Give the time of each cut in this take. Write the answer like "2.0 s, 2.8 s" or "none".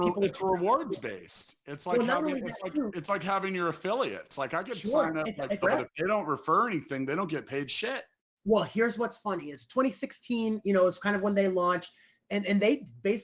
5.6 s